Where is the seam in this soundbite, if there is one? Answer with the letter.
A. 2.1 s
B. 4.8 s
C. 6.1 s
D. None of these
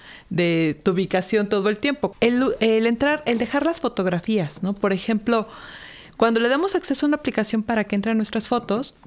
A